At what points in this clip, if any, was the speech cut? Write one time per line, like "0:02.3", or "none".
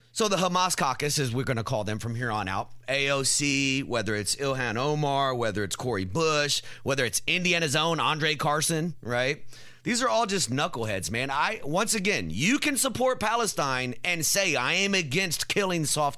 none